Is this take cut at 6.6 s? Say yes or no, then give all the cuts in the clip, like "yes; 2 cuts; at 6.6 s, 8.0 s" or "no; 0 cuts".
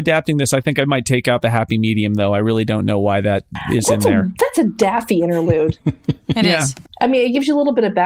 no; 0 cuts